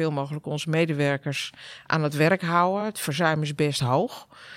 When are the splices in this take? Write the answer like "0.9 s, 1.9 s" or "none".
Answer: none